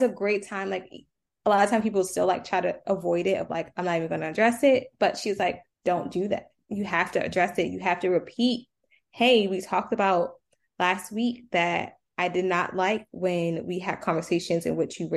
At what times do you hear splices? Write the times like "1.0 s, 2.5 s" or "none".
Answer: none